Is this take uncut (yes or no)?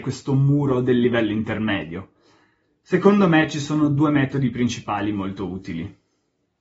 yes